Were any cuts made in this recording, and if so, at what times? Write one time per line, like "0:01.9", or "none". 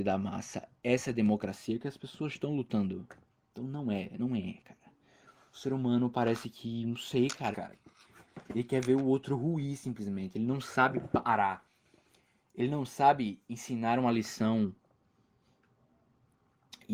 0:07.5